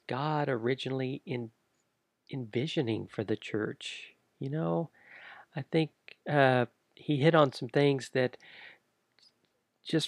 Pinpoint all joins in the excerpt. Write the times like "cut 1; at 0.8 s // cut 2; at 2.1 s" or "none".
none